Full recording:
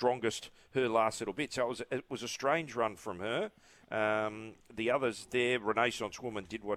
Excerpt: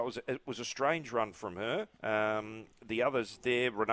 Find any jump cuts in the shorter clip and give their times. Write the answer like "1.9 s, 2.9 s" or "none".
1.9 s